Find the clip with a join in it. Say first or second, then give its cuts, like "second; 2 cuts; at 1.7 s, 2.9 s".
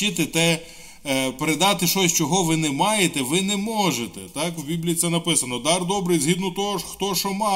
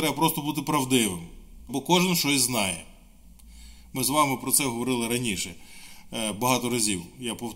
second; 1 cut; at 1.7 s